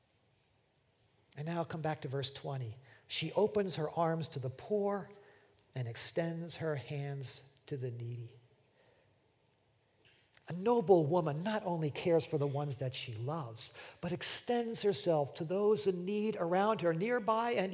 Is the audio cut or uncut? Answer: uncut